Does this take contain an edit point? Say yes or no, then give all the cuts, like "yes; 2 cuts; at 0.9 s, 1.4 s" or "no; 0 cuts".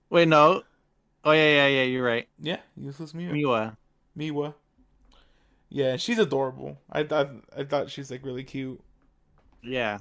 no; 0 cuts